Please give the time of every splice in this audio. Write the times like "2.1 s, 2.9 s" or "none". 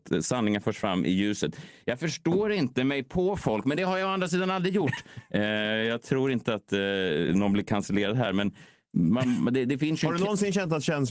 none